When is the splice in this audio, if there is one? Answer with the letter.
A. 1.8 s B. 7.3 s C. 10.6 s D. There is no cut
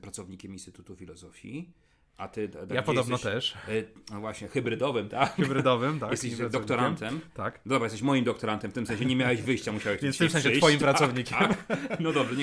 D